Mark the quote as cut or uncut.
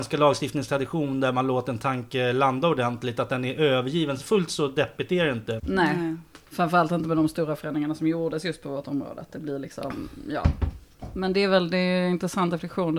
cut